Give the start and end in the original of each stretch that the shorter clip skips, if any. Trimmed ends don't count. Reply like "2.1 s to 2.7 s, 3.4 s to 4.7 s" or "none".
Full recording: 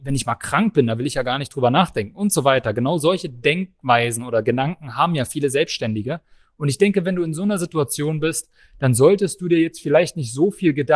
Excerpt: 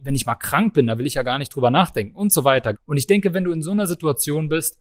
2.7 s to 6.5 s